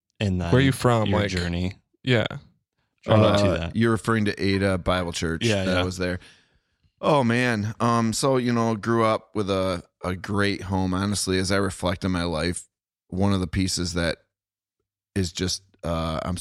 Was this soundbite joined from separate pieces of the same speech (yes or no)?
no